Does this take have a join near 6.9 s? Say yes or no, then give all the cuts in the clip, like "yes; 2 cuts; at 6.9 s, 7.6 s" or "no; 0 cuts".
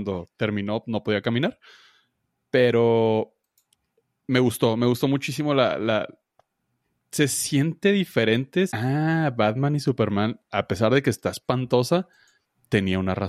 no; 1 cut; at 8.7 s